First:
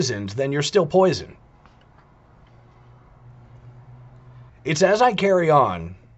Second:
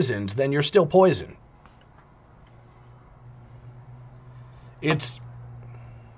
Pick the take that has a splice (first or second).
first